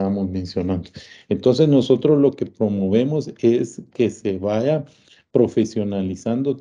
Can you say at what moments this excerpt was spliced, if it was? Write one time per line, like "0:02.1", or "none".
none